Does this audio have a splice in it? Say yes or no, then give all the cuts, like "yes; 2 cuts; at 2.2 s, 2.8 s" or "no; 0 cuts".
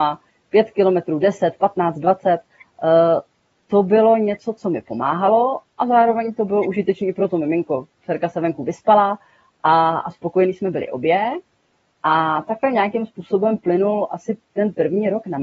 no; 0 cuts